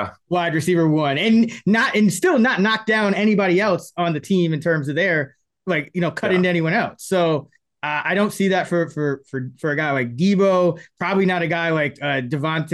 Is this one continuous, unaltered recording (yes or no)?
yes